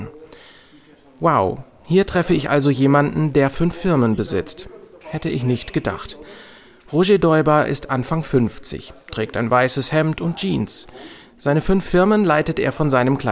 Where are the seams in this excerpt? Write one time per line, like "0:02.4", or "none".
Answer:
none